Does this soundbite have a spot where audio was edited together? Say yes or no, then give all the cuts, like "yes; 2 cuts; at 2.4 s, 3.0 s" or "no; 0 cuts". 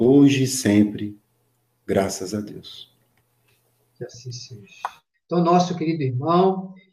yes; 1 cut; at 5.1 s